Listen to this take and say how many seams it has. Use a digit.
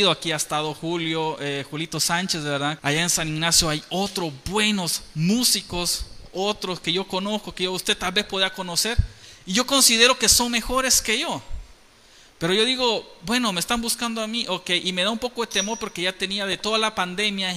1